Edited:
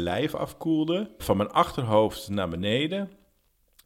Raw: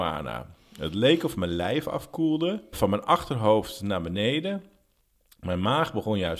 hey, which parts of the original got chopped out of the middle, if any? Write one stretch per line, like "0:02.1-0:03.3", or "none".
none